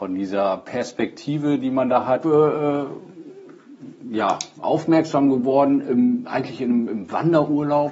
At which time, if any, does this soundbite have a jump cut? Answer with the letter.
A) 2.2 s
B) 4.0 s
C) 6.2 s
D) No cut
A